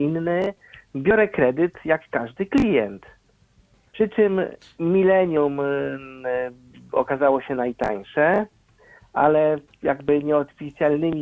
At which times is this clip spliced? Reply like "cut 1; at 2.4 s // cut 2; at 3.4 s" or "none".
cut 1; at 3.9 s